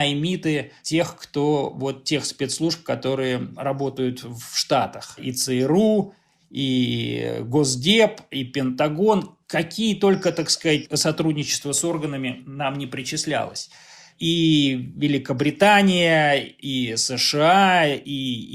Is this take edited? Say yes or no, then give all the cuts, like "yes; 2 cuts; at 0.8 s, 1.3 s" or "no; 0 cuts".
no; 0 cuts